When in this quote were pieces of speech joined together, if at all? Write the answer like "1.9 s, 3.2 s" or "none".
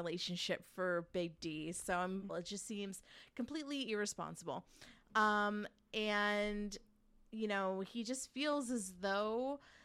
2.3 s